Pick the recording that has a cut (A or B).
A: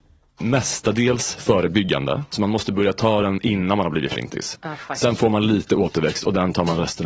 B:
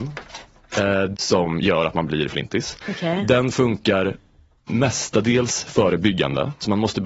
B